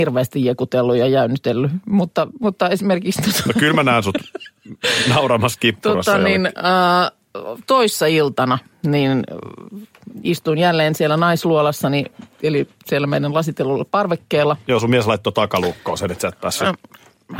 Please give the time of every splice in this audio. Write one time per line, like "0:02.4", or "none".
none